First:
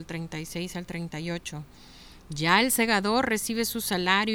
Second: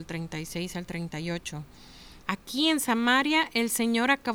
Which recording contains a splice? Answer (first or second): second